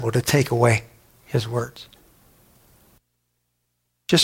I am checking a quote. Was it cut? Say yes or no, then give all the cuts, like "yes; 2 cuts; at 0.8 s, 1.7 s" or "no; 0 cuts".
no; 0 cuts